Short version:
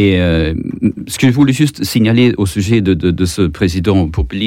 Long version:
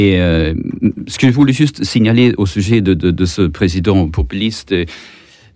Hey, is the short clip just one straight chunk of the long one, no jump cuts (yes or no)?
yes